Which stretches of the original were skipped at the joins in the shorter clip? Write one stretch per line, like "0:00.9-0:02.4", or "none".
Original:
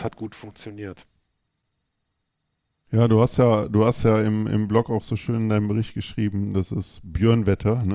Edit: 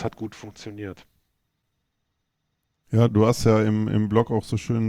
0:03.1-0:03.7